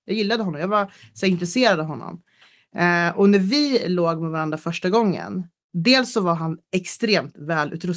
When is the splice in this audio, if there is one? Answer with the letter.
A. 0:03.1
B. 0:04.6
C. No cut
C